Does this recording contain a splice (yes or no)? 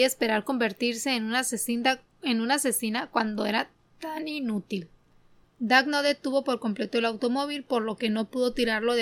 yes